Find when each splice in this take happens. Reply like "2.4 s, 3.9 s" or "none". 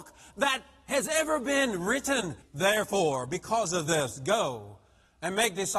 2.4 s